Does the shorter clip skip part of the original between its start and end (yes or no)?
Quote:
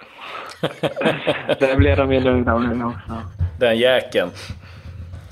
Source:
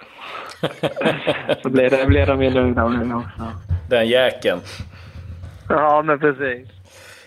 yes